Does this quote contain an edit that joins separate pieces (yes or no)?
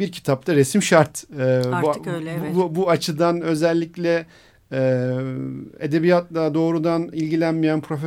no